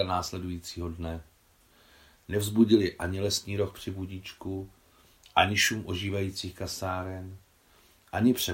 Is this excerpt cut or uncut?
uncut